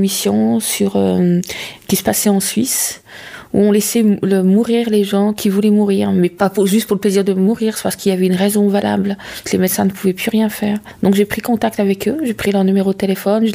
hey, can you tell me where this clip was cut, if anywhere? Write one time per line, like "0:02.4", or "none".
none